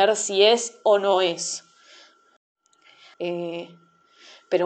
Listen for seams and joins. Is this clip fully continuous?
no; 1 cut; at 3.1 s

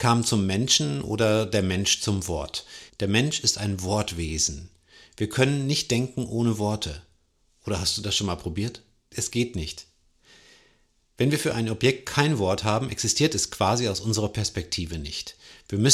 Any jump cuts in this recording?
yes; 2 cuts; at 2.9 s, 9.1 s

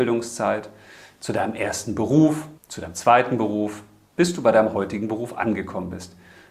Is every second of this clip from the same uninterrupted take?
no; 1 cut; at 2.6 s

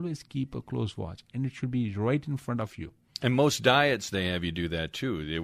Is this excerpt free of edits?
yes; 0 cuts

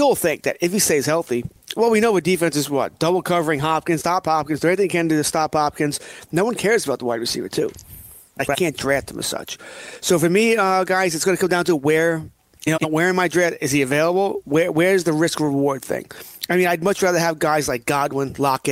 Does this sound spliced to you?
yes; 2 cuts; at 4.0 s, 8.4 s

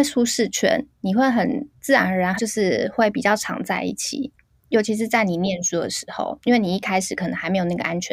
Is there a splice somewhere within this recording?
yes; 1 cut; at 2.4 s

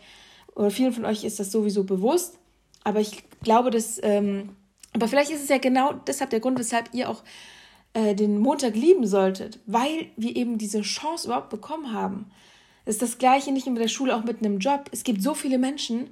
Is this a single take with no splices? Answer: yes; 0 cuts

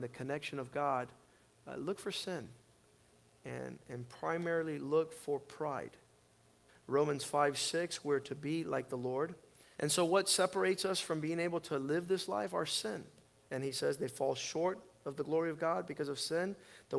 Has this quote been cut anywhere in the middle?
yes; 2 cuts; at 6.7 s, 9.7 s

